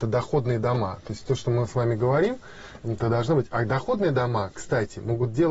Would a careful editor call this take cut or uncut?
uncut